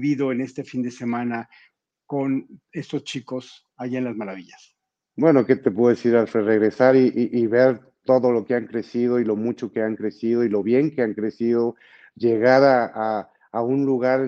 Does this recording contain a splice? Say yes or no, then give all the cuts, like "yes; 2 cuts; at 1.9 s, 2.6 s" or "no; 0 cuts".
no; 0 cuts